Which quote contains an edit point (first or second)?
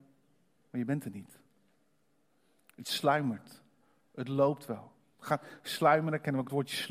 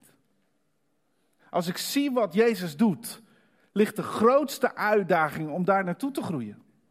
second